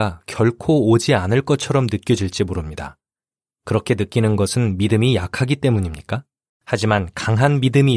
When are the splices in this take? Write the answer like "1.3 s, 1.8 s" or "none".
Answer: 6.5 s